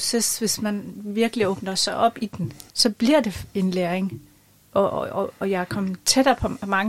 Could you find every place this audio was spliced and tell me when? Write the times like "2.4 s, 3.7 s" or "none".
2.7 s